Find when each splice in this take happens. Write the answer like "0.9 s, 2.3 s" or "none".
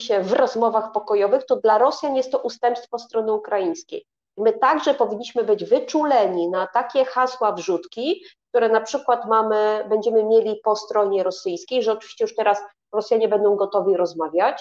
none